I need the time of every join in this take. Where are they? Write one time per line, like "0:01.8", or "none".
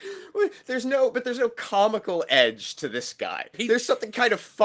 0:03.5

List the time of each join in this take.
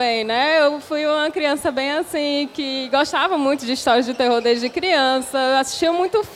none

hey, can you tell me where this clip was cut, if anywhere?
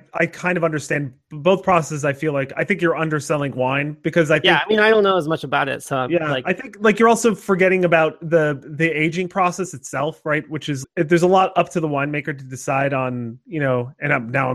0:10.8

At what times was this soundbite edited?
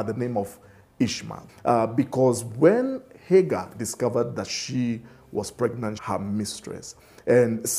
0:01.5
0:06.0

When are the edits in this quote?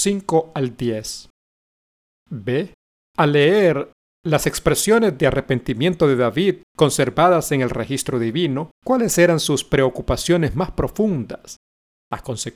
0:02.1
0:06.7
0:08.7

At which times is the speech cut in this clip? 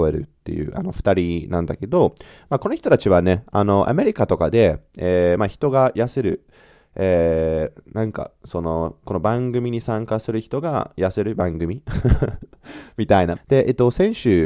0:13.4

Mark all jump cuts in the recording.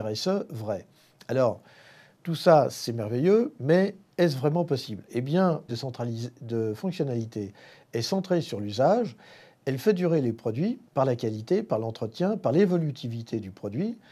0:05.7
0:10.9

